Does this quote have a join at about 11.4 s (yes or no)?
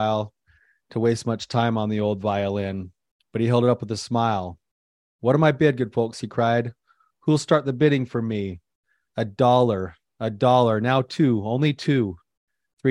no